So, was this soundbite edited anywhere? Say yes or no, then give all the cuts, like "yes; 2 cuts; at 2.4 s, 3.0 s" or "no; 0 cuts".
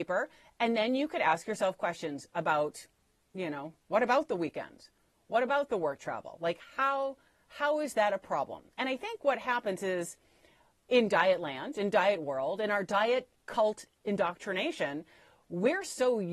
no; 0 cuts